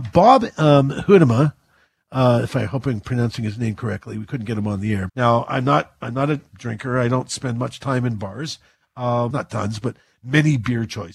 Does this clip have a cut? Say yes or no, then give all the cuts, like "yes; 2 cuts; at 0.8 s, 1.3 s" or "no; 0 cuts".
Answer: yes; 2 cuts; at 5.1 s, 9.3 s